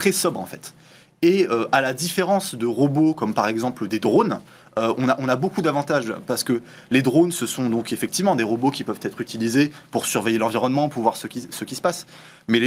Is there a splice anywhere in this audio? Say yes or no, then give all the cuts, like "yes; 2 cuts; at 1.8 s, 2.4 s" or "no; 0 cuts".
no; 0 cuts